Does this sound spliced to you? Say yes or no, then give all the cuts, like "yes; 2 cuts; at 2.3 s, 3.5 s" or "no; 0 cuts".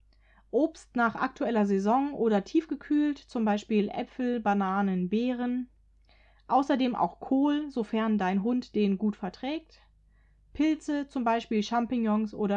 no; 0 cuts